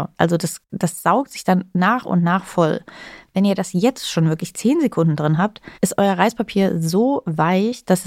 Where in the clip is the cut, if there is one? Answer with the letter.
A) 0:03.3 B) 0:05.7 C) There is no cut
B